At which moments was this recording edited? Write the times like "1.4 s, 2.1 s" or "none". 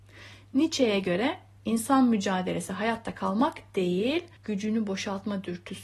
4.4 s